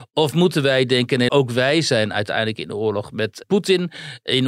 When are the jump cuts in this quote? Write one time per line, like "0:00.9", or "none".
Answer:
0:01.3
0:03.4